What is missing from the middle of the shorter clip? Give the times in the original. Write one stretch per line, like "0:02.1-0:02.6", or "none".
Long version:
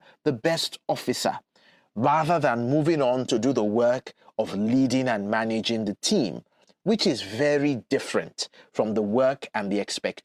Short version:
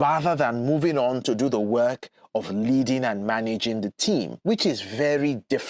0:06.4-0:06.8